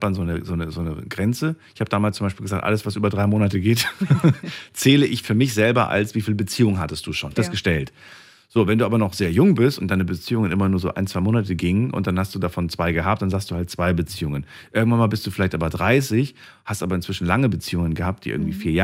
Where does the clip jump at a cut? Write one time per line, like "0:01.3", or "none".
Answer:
0:07.3